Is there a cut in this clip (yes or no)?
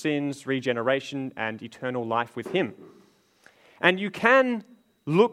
no